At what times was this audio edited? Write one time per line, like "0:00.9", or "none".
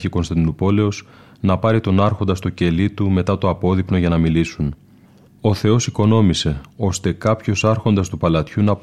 0:05.3